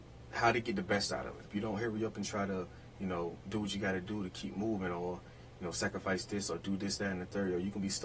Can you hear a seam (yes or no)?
yes